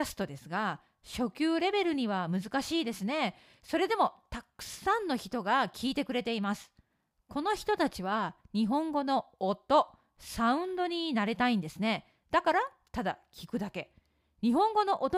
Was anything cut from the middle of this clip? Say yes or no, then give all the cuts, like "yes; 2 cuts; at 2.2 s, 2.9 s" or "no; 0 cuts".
no; 0 cuts